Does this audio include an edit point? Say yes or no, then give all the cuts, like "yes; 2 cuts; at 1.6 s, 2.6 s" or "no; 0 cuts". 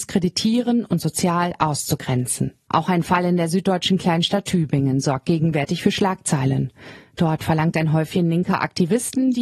yes; 1 cut; at 2.7 s